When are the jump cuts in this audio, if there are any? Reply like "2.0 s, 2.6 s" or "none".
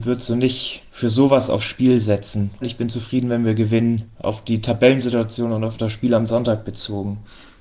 2.6 s